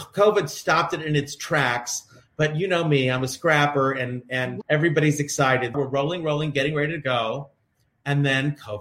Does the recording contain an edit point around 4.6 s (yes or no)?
yes